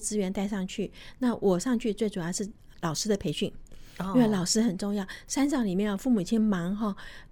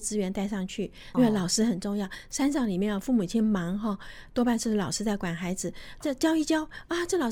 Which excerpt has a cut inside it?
second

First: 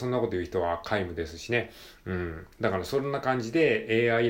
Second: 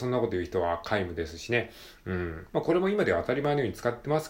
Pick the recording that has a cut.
second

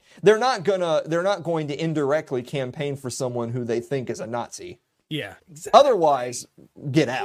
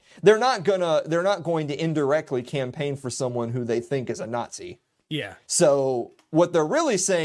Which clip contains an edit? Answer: first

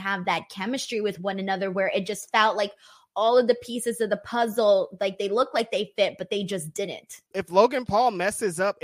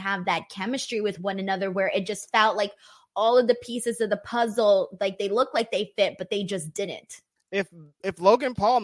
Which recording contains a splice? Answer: first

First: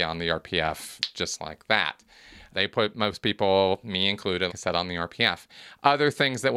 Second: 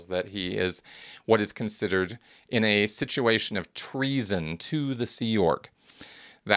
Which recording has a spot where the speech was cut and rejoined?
first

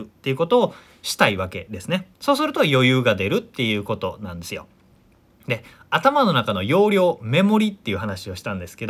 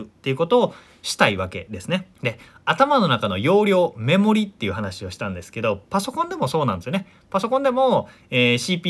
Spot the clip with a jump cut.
second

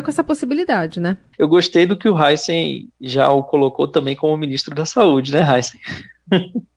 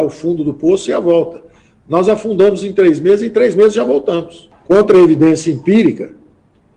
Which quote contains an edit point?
first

